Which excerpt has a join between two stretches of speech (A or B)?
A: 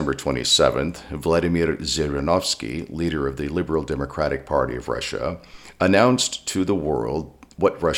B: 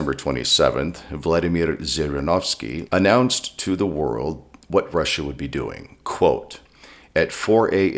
B